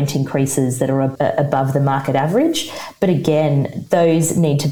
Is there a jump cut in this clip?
no; 0 cuts

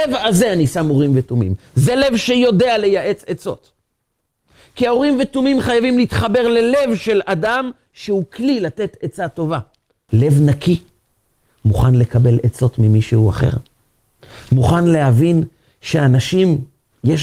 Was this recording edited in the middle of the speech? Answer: yes; 1 cut; at 10.1 s

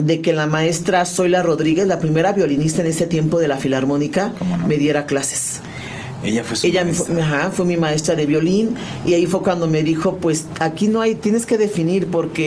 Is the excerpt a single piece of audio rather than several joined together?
yes; 0 cuts

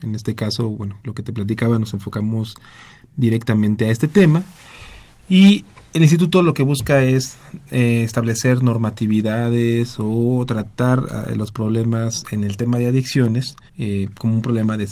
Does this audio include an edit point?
yes; 1 cut; at 13.7 s

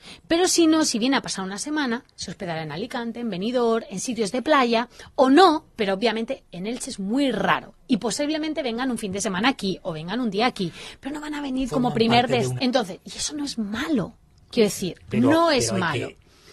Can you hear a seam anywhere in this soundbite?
yes; 1 cut; at 12.6 s

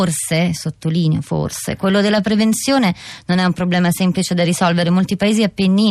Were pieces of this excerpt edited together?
no; 0 cuts

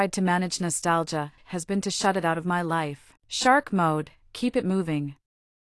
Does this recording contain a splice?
yes; 2 cuts; at 1.4 s, 3.2 s

